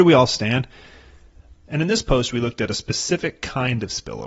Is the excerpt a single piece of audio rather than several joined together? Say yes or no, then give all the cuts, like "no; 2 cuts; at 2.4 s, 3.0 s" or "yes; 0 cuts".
no; 1 cut; at 1.7 s